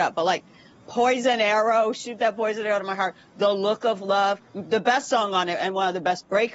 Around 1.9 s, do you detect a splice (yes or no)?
no